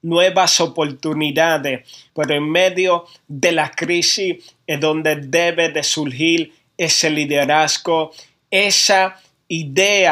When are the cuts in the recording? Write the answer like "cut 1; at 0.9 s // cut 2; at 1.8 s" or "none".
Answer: cut 1; at 2.1 s